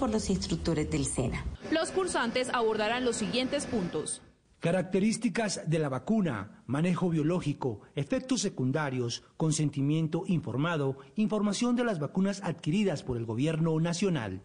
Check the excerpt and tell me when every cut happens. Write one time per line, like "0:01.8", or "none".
none